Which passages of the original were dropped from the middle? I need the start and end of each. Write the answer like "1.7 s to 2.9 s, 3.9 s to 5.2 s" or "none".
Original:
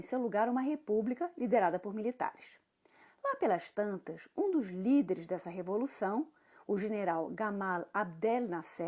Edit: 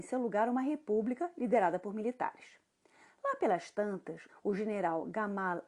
4.3 s to 6.5 s